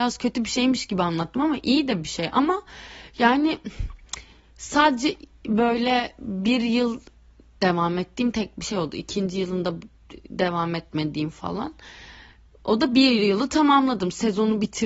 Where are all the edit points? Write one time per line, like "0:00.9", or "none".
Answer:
none